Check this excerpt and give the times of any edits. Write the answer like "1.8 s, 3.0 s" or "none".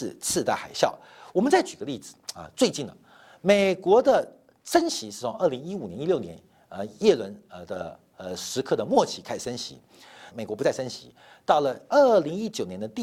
10.3 s